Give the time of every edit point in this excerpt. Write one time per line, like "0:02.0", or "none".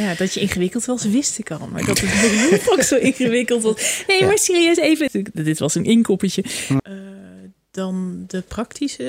0:05.1
0:06.8